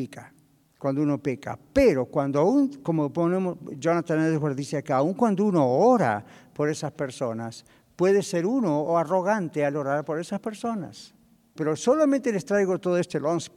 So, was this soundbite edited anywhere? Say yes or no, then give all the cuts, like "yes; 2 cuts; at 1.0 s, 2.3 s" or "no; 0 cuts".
yes; 1 cut; at 11.5 s